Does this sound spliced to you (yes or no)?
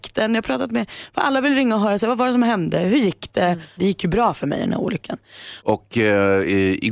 yes